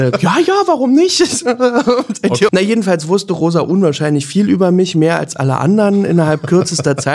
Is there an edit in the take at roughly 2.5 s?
yes; 1 cut; at 2.5 s

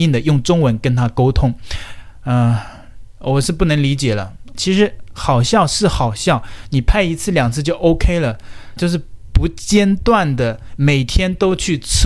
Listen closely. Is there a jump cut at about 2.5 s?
no; 2 cuts; at 4.5 s, 8.8 s

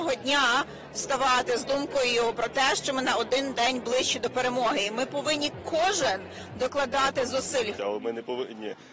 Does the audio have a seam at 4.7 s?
no; 1 cut; at 7.8 s

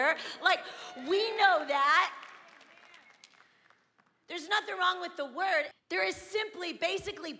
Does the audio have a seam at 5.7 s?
yes; 1 cut; at 5.7 s

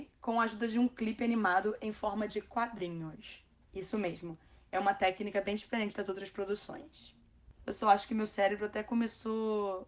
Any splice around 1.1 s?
no; 2 cuts; at 3.7 s, 7.6 s

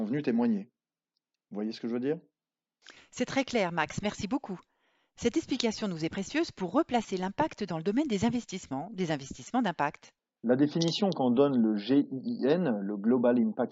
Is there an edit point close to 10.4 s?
yes; 1 cut; at 10.4 s

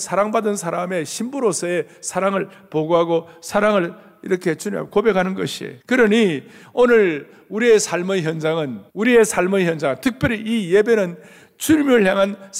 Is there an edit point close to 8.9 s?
yes; 2 cuts; at 5.8 s, 8.9 s

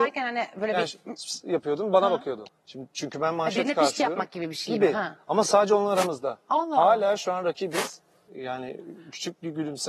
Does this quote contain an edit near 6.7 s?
no; 2 cuts; at 2.5 s, 8.3 s

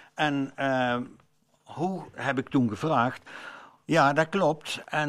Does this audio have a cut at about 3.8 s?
yes; 1 cut; at 3.8 s

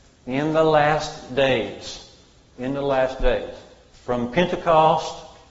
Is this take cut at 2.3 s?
no; 1 cut; at 3.9 s

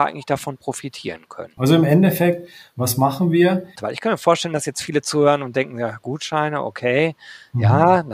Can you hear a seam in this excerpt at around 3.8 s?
yes; 2 cuts; at 1.6 s, 3.8 s

